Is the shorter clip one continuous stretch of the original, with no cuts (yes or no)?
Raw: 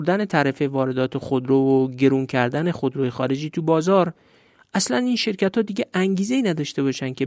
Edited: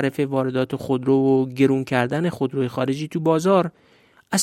yes